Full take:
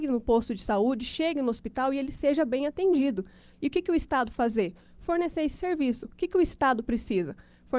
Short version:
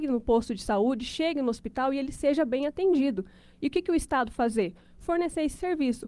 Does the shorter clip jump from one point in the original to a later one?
no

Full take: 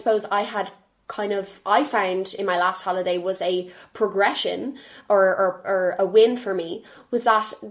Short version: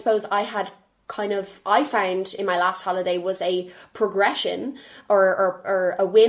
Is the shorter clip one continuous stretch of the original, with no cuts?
yes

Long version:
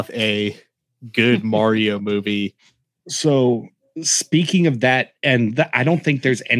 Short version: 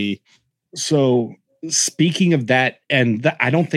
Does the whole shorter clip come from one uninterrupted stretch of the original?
yes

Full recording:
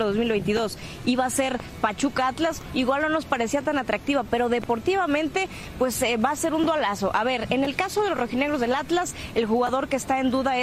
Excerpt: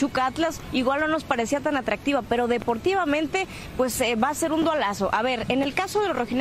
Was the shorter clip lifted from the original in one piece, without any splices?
yes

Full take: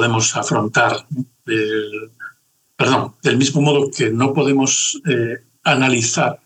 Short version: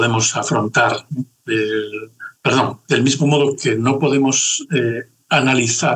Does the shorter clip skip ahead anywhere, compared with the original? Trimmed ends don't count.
yes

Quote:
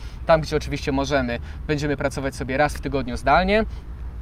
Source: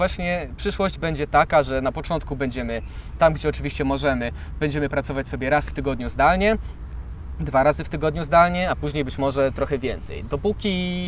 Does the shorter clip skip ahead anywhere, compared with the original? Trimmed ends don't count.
no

